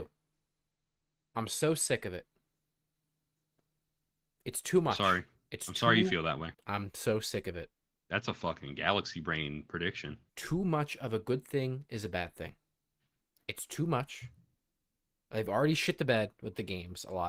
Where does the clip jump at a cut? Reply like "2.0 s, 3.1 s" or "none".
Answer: 6.5 s, 10.3 s